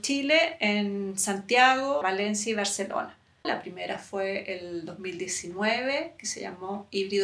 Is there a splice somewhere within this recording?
yes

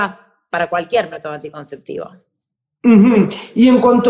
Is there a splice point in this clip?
no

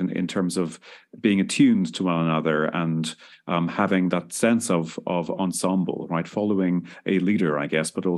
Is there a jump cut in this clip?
no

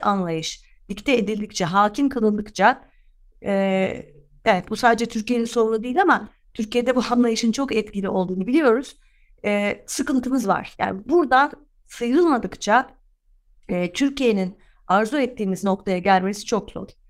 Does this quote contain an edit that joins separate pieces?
no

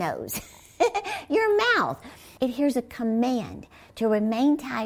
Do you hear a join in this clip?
yes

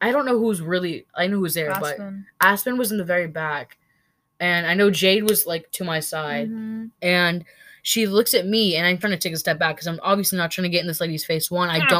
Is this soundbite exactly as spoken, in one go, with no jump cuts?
no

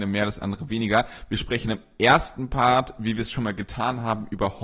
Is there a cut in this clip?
no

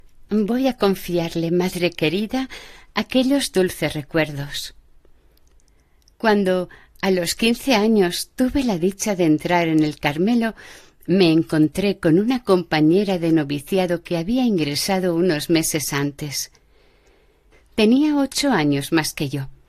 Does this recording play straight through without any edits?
yes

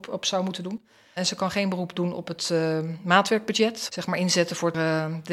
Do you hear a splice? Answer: yes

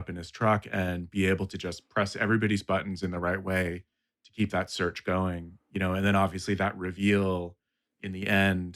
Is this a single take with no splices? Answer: yes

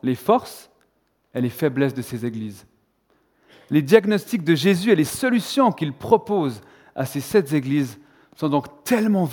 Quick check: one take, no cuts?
yes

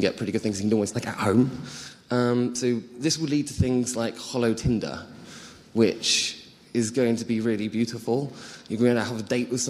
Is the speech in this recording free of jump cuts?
no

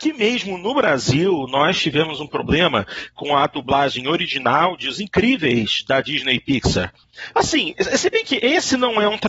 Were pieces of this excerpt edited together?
yes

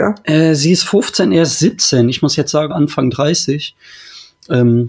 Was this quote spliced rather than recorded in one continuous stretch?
yes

